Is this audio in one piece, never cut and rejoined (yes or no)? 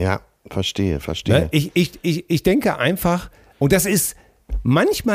yes